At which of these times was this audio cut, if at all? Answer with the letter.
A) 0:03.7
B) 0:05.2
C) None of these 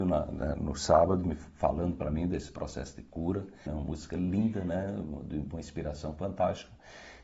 A